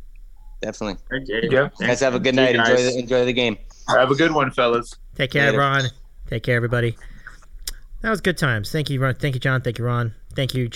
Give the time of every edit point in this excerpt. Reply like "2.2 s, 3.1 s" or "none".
none